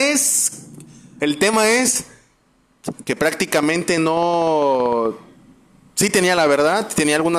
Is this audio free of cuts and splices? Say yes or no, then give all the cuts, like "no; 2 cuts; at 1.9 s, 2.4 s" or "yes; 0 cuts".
no; 2 cuts; at 1.2 s, 3.0 s